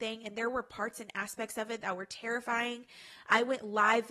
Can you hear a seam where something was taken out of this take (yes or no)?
no